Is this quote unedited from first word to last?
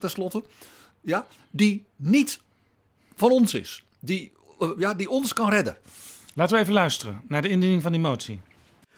yes; 0 cuts

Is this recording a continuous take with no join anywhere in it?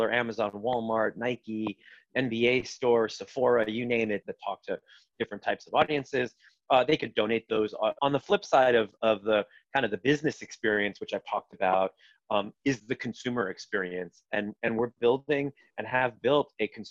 no; 2 cuts; at 4.2 s, 8.0 s

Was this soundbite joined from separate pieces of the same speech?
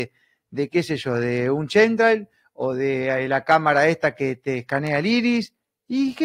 no; 0 cuts

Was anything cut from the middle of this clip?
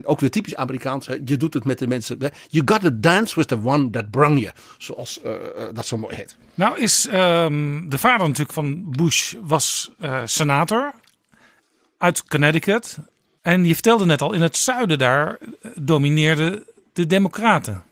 yes; 2 cuts; at 8.5 s, 13.4 s

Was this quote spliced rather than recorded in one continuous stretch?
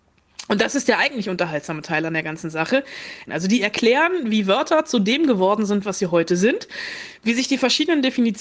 yes; 1 cut; at 3.3 s

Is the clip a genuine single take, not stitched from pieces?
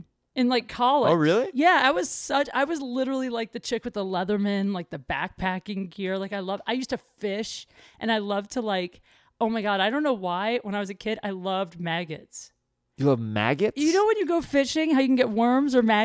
yes; 0 cuts

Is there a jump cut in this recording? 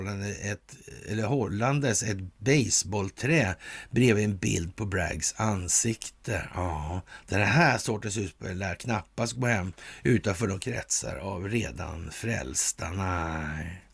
no; 0 cuts

